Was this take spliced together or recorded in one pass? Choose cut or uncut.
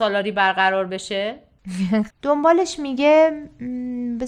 cut